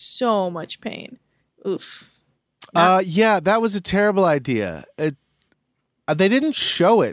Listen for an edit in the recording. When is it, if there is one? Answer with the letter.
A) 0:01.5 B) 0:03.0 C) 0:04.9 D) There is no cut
D